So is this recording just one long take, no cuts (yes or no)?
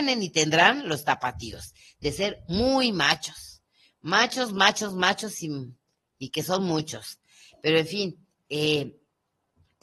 yes